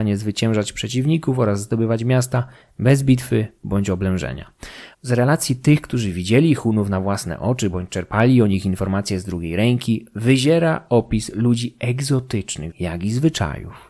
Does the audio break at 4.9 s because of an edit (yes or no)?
yes